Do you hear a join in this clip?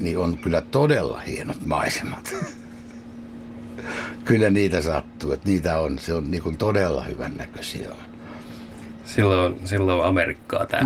no; 0 cuts

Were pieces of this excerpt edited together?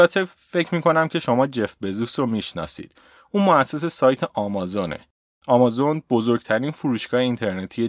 no; 0 cuts

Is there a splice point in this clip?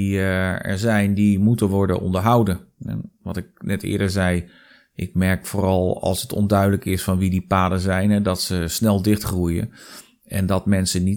no; 0 cuts

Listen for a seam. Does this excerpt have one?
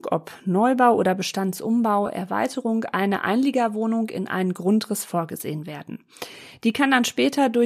no; 0 cuts

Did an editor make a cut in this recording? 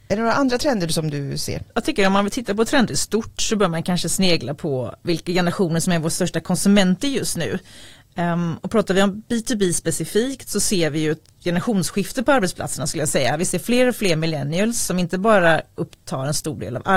yes; 1 cut; at 1.7 s

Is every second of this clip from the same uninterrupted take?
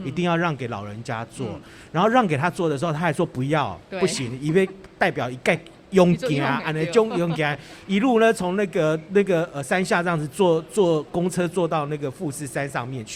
yes; 0 cuts

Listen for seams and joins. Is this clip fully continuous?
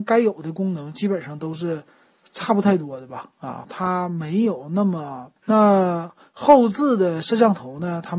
no; 2 cuts; at 3.6 s, 5.4 s

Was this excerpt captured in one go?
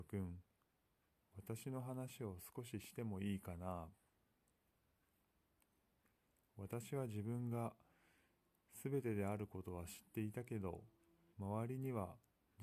no; 1 cut; at 11.3 s

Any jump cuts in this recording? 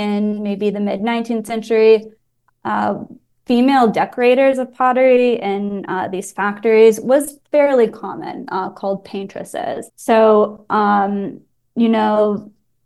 yes; 1 cut; at 9.9 s

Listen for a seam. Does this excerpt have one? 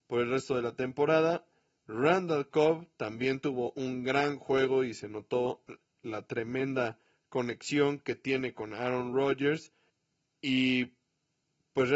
no; 0 cuts

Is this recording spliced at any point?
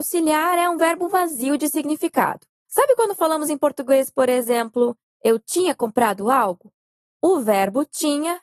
yes; 1 cut; at 2.6 s

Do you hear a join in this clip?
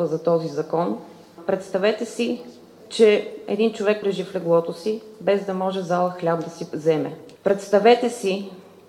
yes; 2 cuts; at 4.0 s, 7.4 s

